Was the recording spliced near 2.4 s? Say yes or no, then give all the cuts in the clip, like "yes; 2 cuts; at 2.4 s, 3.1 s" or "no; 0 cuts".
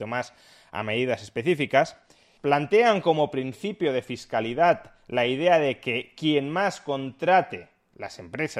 yes; 1 cut; at 2.4 s